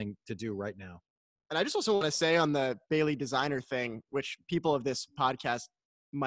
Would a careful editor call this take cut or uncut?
uncut